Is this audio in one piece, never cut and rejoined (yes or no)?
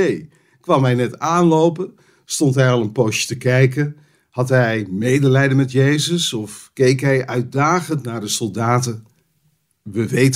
yes